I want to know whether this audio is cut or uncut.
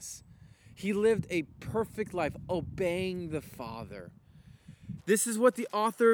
cut